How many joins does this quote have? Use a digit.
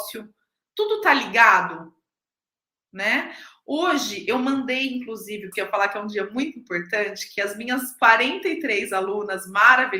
1